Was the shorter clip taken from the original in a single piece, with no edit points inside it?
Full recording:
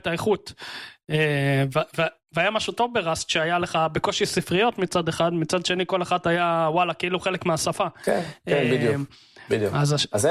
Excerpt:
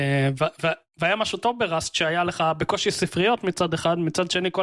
yes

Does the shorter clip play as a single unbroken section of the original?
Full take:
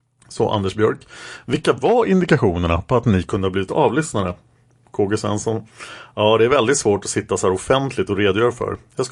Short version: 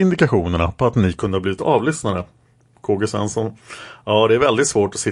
yes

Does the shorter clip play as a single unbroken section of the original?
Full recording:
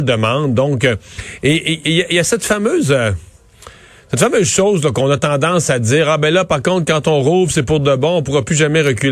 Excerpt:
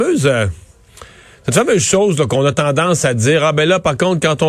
yes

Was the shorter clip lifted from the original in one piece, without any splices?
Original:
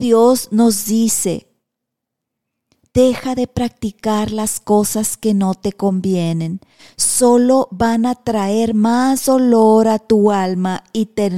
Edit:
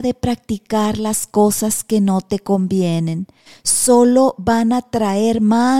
yes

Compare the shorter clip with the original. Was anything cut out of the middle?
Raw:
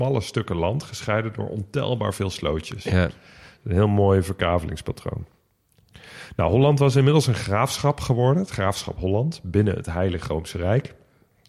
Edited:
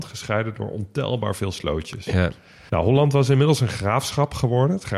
yes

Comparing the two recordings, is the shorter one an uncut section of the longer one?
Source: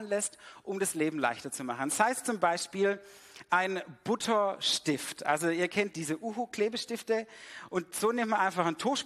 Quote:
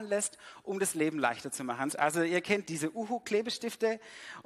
no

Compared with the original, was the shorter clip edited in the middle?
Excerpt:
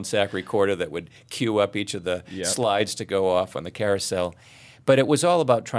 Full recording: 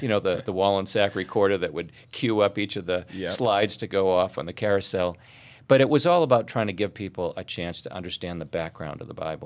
no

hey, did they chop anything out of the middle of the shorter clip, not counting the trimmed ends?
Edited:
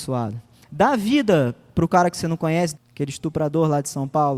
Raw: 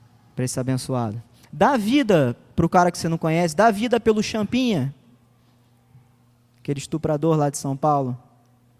yes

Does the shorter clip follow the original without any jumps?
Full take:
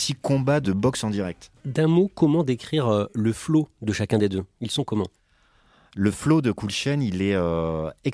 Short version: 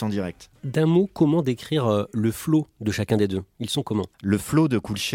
no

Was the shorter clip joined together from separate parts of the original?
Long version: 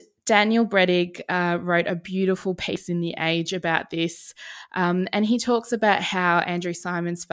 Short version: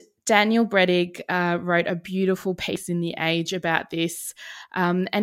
no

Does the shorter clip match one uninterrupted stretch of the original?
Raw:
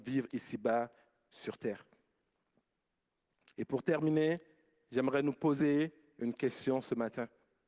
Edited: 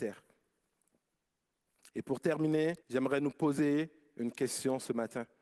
no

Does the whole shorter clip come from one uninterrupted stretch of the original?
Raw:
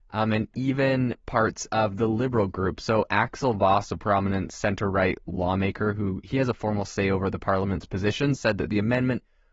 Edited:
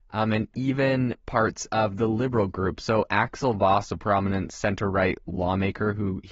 yes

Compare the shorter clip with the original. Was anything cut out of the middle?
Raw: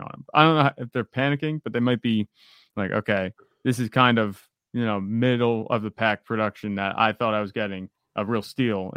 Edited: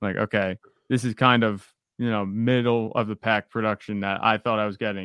no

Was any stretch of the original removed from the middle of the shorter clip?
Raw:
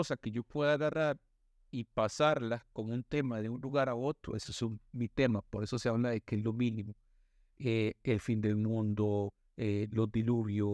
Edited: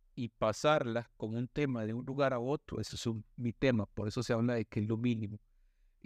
no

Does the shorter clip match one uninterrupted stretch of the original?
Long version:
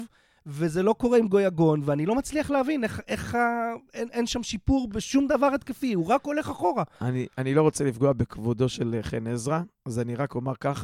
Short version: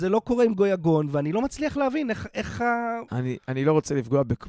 no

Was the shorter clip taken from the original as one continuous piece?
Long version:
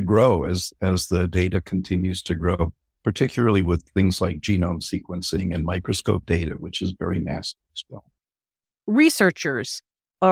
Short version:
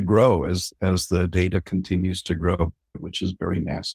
no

